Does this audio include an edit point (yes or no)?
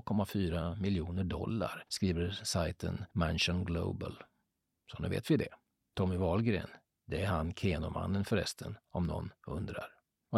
no